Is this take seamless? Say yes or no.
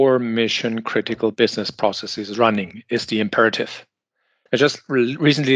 no